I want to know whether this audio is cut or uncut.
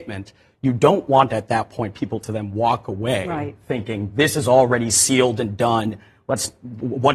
uncut